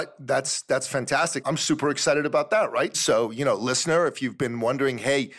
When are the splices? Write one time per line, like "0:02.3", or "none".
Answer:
0:01.4
0:02.9